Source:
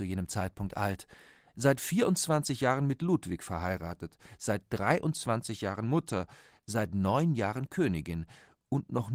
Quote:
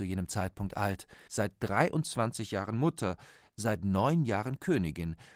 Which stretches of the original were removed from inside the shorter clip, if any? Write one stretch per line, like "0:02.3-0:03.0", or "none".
0:01.3-0:04.4